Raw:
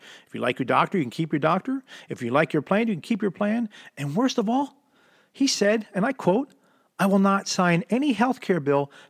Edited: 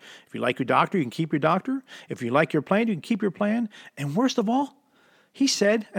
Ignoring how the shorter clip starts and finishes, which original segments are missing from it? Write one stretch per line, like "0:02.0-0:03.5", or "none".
none